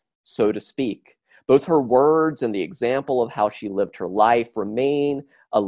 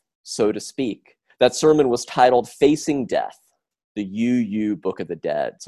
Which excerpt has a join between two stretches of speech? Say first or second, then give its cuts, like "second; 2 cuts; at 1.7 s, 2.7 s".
second; 1 cut; at 1.3 s